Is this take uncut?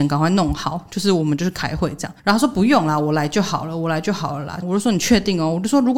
no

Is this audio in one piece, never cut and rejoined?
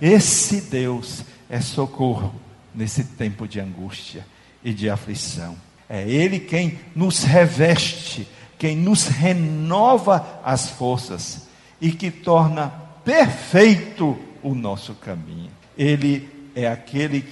no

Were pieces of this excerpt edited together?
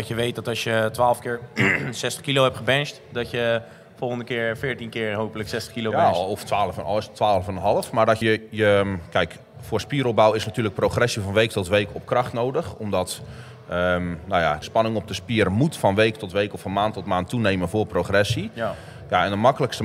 yes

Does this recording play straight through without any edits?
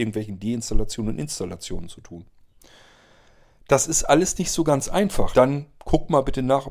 no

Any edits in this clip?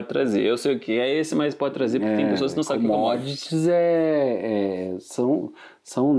no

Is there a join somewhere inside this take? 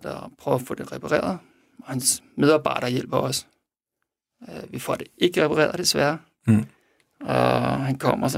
no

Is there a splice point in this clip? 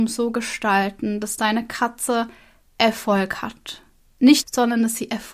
yes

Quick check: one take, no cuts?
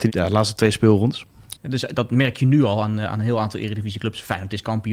no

